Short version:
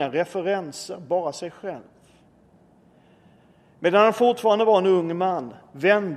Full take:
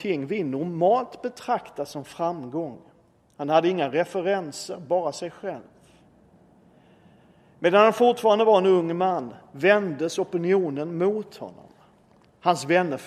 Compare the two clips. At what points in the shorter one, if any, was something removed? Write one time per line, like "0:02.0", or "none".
none